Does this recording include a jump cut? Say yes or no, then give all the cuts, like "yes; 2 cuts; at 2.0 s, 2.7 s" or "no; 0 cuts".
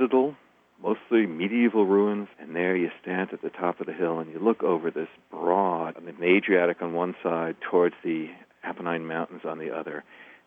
yes; 2 cuts; at 2.3 s, 5.9 s